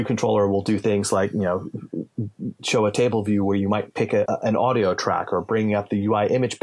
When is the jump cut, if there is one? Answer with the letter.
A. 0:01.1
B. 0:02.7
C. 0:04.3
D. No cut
C